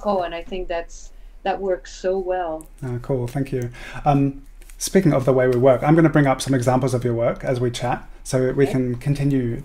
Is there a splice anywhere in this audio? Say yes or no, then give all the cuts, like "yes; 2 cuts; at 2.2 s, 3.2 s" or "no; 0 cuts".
no; 0 cuts